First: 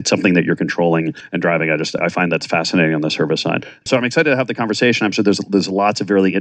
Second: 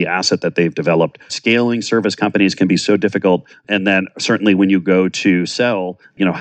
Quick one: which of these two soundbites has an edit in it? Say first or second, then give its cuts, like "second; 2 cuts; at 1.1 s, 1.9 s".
second; 1 cut; at 1.3 s